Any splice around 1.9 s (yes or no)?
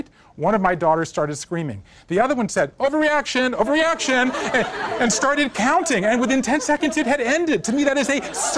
no